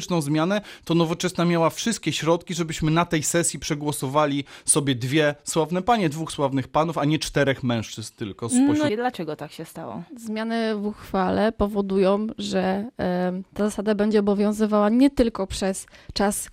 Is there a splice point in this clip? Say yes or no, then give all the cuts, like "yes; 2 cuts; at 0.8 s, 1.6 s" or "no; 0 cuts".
yes; 1 cut; at 8.9 s